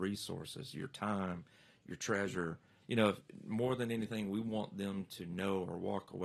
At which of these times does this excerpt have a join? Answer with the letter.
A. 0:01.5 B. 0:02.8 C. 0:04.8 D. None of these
B